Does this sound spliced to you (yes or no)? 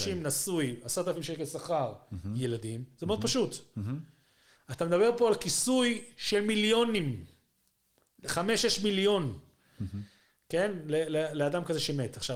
no